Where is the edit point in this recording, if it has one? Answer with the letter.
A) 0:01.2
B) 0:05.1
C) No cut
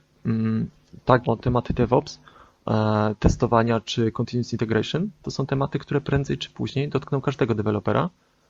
A